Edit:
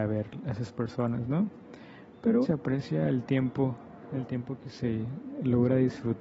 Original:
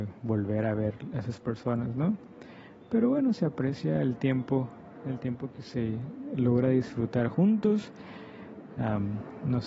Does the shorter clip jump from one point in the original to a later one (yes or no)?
yes